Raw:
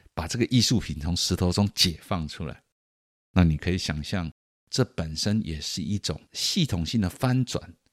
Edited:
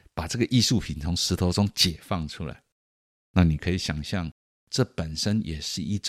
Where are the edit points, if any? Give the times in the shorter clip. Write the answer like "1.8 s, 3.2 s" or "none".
none